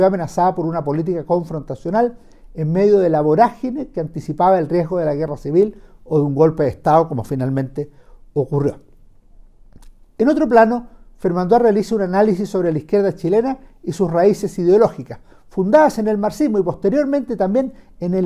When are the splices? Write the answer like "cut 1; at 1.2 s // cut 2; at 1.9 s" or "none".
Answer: none